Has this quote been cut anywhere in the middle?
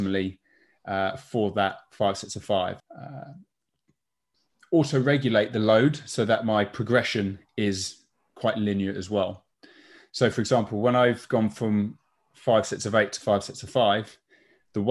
yes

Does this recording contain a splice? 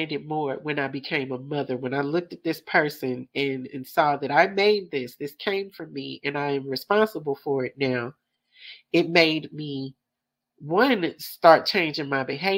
no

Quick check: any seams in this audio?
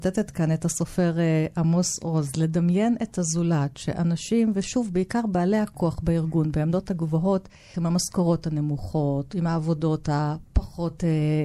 yes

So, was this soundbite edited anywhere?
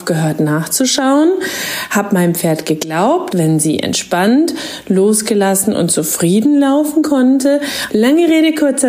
yes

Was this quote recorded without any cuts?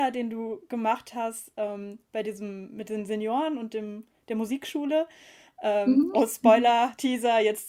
yes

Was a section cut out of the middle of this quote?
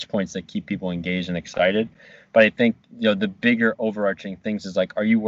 no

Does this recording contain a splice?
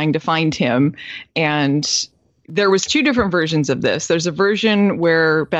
no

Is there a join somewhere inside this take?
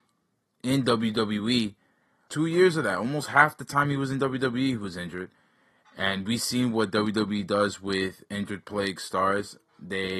yes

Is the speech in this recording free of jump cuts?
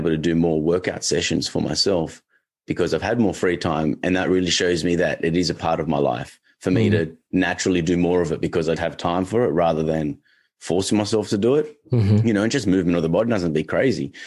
no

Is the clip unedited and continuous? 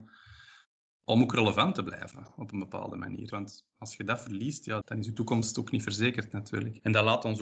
no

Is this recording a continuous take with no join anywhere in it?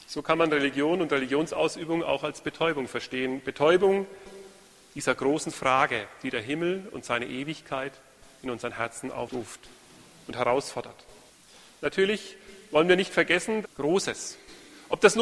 no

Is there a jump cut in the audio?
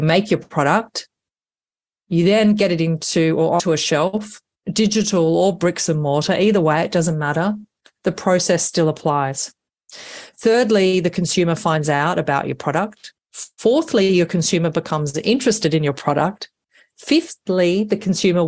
no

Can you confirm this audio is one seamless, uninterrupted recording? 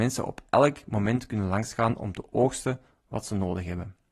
yes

